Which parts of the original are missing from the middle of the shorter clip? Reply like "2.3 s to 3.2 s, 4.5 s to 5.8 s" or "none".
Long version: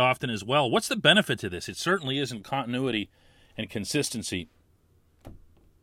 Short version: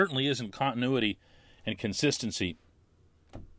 none